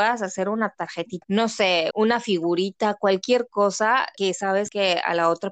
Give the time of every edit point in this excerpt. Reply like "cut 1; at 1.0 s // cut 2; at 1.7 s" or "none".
cut 1; at 1.9 s

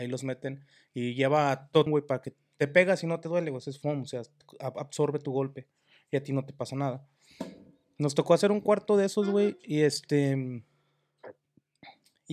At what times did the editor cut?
cut 1; at 1.9 s

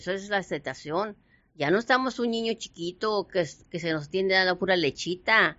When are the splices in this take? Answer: none

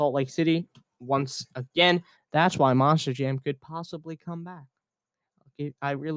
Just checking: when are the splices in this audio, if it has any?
cut 1; at 2.1 s

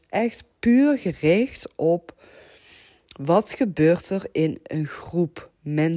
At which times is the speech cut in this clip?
none

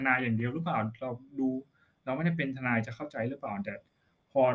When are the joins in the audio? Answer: none

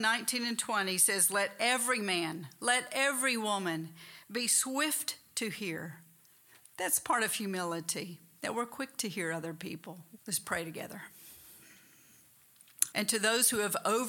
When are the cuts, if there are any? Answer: cut 1; at 10.2 s // cut 2; at 12.9 s

